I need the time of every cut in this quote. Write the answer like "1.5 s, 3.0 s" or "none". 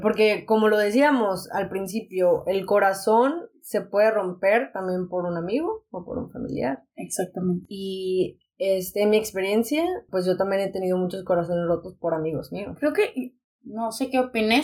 10.1 s, 13.4 s